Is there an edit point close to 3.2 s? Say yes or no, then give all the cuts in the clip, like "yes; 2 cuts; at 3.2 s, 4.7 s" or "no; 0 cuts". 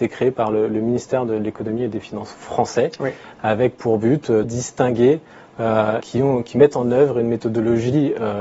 no; 2 cuts; at 4.4 s, 6.0 s